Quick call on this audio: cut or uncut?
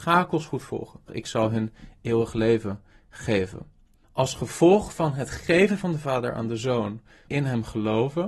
cut